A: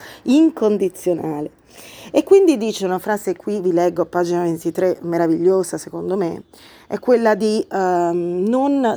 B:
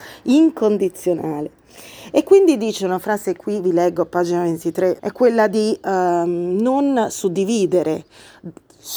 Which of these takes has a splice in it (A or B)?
B